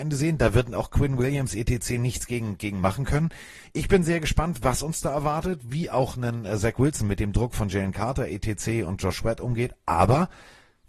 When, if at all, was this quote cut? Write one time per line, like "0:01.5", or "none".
none